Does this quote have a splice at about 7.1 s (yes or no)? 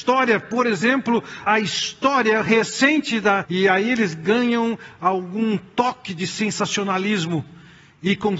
no